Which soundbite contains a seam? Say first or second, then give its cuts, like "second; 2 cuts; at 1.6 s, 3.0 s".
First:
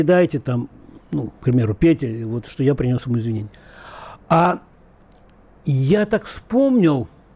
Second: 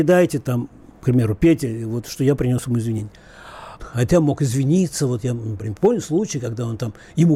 second; 2 cuts; at 0.9 s, 3.8 s